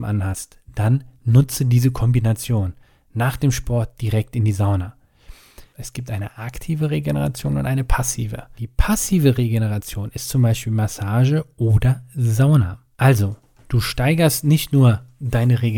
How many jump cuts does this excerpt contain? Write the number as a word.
three